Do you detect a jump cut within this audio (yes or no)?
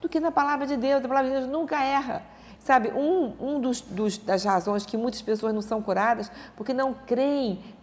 yes